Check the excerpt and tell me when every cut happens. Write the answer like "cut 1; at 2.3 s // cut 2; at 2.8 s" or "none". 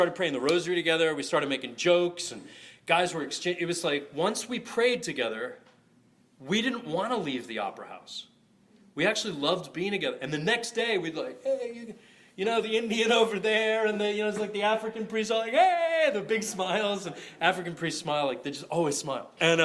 none